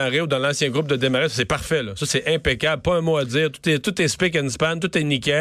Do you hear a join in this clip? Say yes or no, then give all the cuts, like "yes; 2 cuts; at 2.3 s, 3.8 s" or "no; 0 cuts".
no; 0 cuts